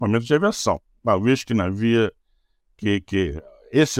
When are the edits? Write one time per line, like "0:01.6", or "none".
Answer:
none